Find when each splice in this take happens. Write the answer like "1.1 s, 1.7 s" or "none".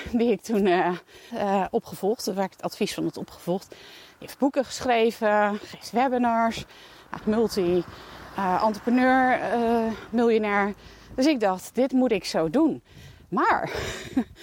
1.3 s, 7.2 s, 11.7 s